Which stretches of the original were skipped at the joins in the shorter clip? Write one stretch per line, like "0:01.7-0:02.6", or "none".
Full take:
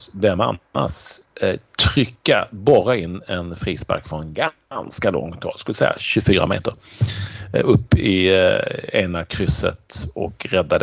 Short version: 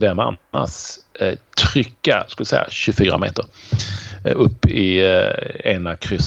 0:02.5-0:05.6